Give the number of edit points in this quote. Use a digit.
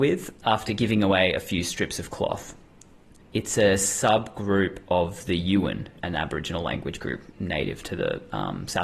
2